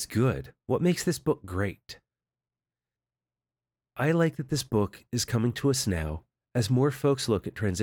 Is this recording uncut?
yes; 0 cuts

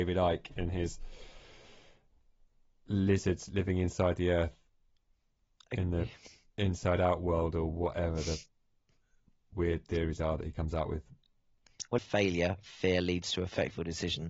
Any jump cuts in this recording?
yes; 1 cut; at 12.0 s

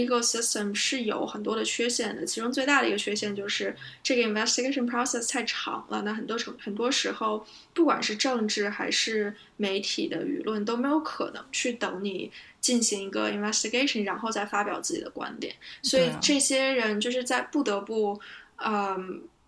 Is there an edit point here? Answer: yes; 1 cut; at 6.6 s

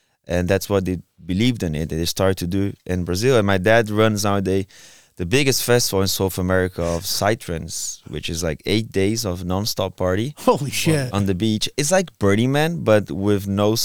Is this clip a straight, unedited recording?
yes; 0 cuts

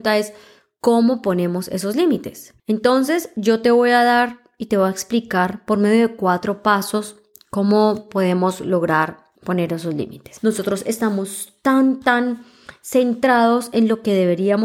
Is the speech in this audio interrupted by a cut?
yes; 3 cuts; at 2.6 s, 9.3 s, 10.4 s

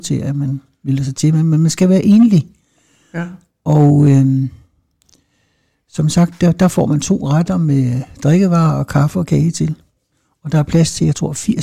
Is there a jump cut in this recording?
no; 0 cuts

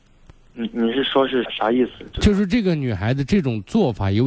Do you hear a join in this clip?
yes; 1 cut; at 1.4 s

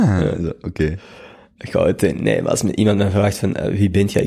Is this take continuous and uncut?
yes; 0 cuts

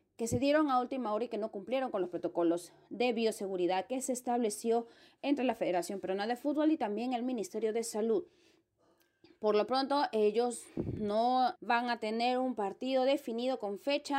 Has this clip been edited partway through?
yes; 1 cut; at 11.5 s

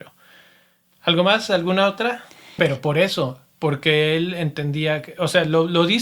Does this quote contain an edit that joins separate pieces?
yes; 1 cut; at 2.6 s

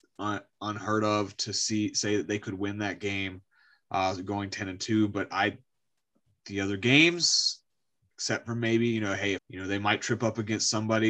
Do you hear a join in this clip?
yes; 1 cut; at 9.4 s

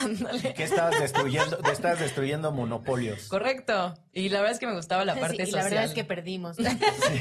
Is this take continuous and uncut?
yes; 0 cuts

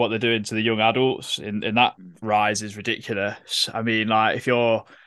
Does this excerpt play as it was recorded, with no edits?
yes; 0 cuts

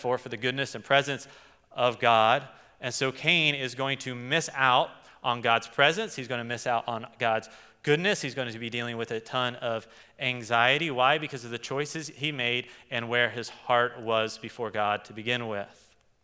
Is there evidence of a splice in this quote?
no; 0 cuts

